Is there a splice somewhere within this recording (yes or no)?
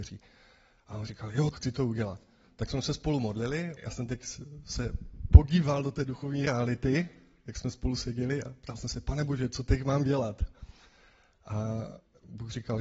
yes